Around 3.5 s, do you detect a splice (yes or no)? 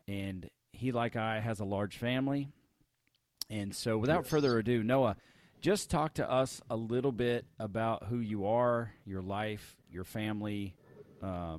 no